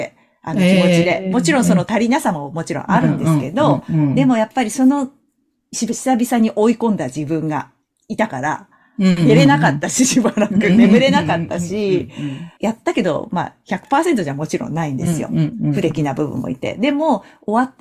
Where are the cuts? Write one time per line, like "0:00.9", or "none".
0:12.6